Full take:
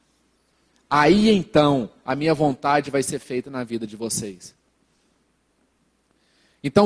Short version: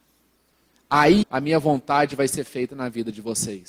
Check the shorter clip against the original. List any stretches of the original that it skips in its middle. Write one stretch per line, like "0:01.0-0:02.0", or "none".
0:01.2-0:02.0